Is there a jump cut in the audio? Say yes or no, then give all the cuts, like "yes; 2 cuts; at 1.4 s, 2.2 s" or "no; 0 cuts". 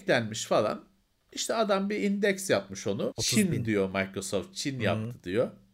yes; 1 cut; at 3.1 s